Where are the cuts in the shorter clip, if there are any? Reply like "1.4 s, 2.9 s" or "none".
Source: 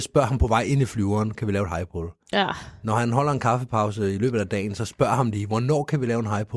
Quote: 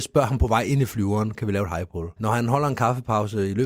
2.2 s